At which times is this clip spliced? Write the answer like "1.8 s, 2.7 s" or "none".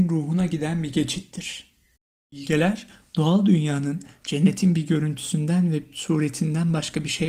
none